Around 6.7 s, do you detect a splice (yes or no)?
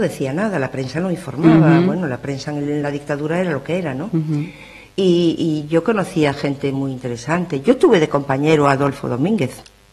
no